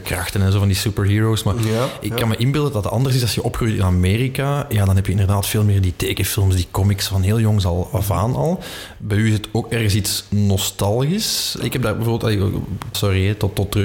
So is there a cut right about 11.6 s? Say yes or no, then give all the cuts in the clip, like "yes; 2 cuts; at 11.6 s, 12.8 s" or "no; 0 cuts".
yes; 2 cuts; at 11.6 s, 12.9 s